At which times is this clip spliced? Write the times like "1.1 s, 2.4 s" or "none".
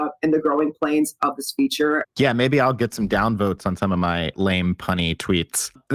2.0 s, 4.3 s